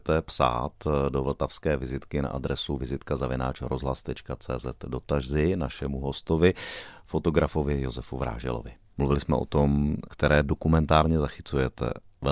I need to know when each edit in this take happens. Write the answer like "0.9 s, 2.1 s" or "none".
8.9 s, 10.1 s